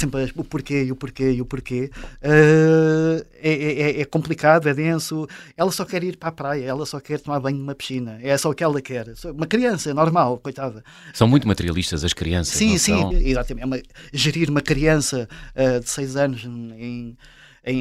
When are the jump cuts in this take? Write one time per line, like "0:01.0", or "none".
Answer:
0:11.1
0:13.1